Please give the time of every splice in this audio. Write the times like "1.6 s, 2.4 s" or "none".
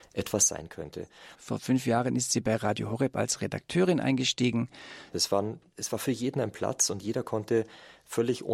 1.4 s, 5.1 s